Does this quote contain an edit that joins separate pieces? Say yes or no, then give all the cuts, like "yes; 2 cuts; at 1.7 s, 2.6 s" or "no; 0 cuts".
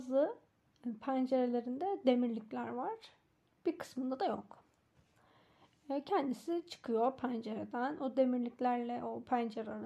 no; 0 cuts